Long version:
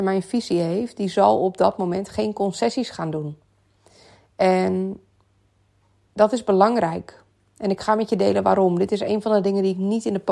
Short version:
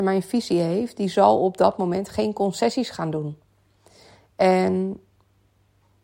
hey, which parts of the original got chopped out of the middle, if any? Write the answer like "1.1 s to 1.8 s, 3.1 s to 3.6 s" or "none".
none